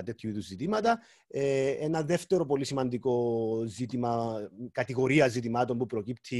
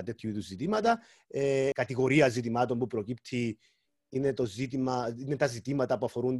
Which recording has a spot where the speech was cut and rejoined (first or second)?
second